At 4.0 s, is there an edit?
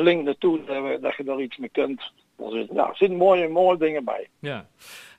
no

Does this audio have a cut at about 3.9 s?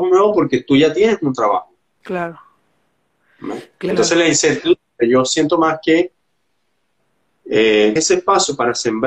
yes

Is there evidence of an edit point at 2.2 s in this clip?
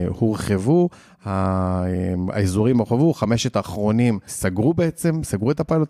no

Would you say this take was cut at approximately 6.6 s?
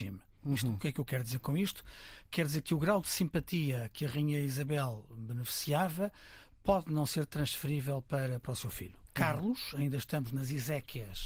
no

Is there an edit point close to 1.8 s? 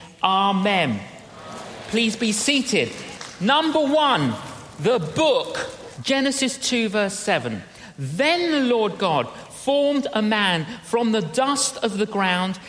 no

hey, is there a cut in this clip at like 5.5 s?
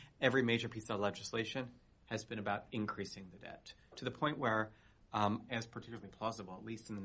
yes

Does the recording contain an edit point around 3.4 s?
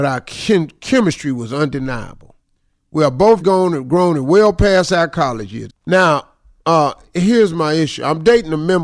yes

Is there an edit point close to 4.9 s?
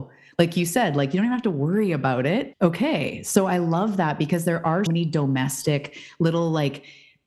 yes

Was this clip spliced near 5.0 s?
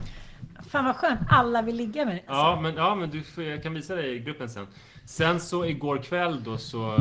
no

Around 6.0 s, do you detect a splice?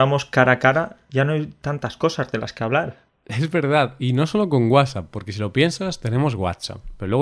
no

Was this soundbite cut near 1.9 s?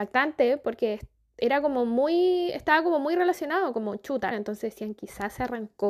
no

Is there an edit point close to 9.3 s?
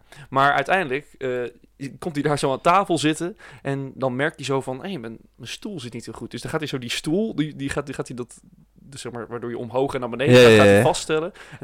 no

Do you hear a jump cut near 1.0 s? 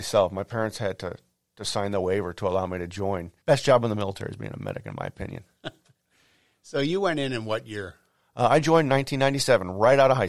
no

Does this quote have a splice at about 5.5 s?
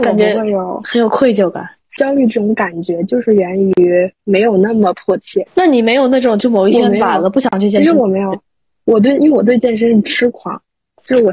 yes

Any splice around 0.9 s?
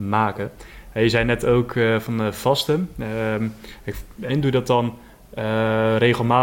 no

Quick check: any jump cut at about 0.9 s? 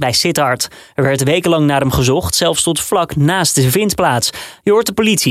no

